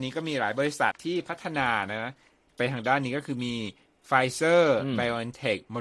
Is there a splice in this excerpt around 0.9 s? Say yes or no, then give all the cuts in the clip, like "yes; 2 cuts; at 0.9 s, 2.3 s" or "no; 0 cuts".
yes; 1 cut; at 0.9 s